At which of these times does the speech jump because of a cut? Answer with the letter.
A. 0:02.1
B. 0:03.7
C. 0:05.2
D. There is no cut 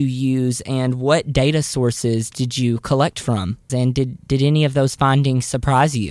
B